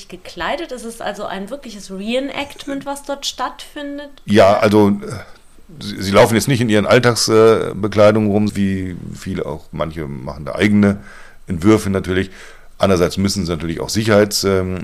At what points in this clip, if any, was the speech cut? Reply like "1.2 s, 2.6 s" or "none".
8.5 s